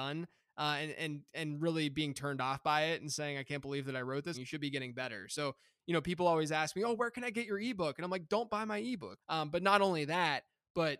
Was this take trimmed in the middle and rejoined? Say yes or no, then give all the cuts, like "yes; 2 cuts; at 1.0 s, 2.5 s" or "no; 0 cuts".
yes; 2 cuts; at 4.3 s, 9.2 s